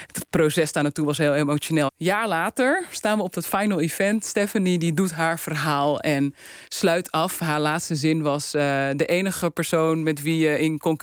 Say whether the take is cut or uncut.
cut